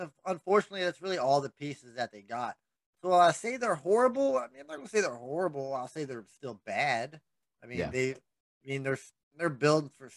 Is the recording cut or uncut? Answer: uncut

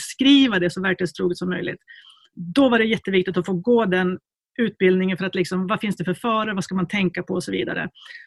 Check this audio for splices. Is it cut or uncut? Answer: uncut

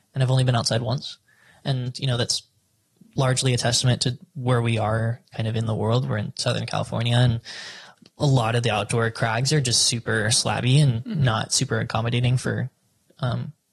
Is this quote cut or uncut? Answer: uncut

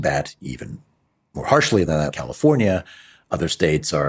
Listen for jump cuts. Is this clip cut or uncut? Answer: cut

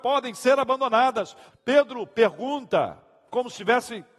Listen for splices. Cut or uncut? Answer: cut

